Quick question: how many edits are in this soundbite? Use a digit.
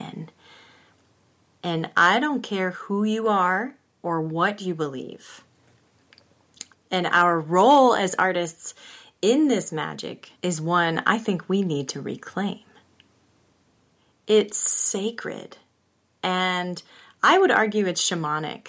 2